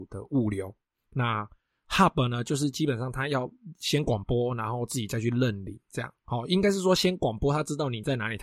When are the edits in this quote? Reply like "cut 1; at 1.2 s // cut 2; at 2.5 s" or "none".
none

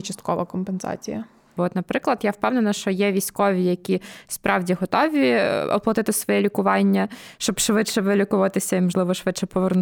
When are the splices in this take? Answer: cut 1; at 1.6 s

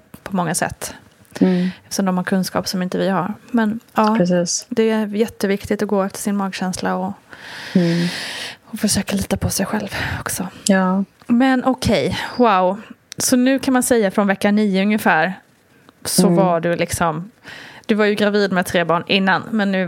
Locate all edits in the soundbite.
cut 1; at 11.1 s

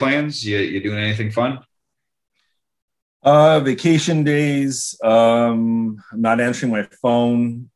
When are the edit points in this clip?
none

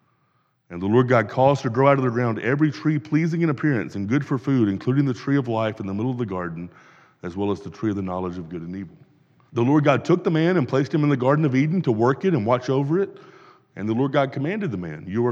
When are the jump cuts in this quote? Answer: cut 1; at 9.5 s

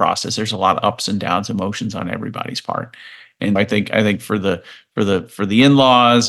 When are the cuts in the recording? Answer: cut 1; at 3.6 s

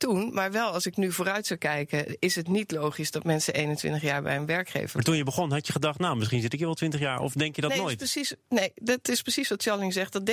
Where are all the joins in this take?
none

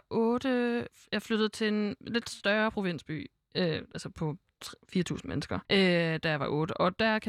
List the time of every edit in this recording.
cut 1; at 5.7 s

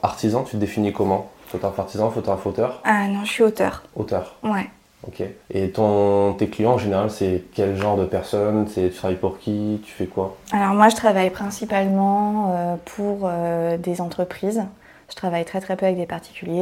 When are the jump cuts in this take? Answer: cut 1; at 5.4 s

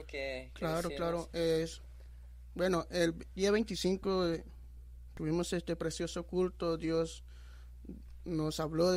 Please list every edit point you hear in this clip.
none

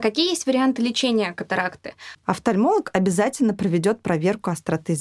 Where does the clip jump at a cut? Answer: cut 1; at 2.2 s

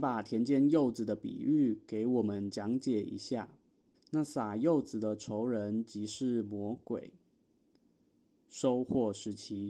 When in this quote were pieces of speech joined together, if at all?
cut 1; at 3.9 s

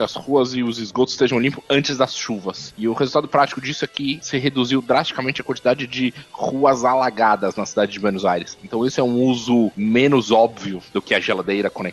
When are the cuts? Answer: none

